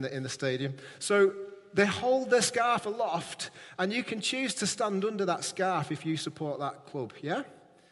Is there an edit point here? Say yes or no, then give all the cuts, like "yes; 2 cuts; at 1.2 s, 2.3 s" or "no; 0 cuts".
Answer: no; 0 cuts